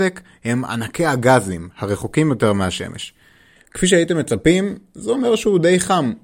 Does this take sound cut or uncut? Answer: cut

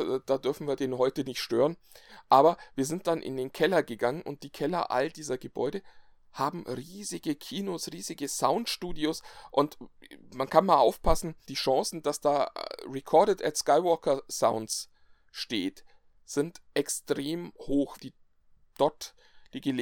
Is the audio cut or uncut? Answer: cut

